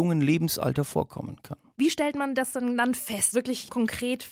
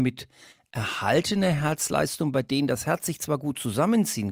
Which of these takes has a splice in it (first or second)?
first